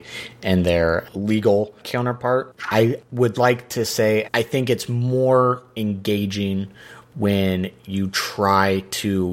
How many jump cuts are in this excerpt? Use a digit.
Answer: 2